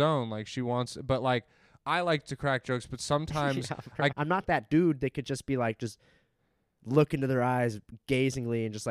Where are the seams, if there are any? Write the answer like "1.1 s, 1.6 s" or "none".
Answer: 4.1 s